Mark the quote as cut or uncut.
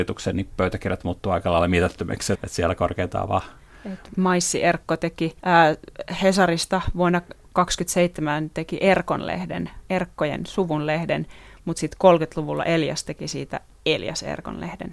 cut